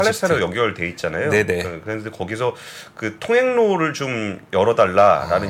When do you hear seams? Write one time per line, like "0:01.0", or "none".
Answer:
none